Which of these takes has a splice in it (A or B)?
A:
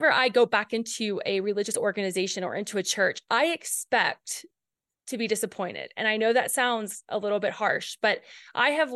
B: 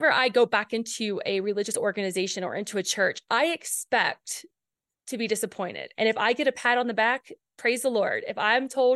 B